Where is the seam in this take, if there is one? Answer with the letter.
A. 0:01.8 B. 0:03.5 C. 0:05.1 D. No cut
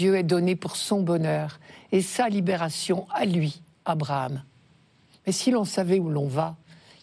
C